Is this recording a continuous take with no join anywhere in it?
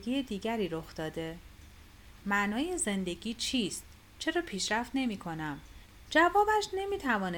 no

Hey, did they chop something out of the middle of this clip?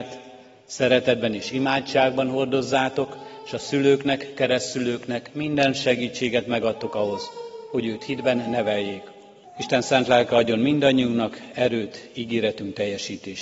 yes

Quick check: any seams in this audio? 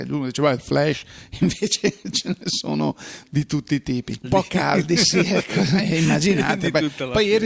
yes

